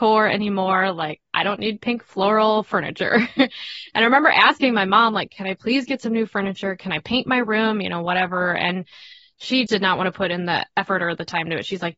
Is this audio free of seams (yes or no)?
no